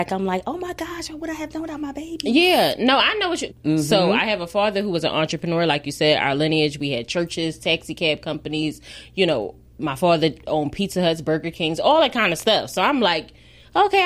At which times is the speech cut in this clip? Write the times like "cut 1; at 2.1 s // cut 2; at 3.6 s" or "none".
cut 1; at 3.5 s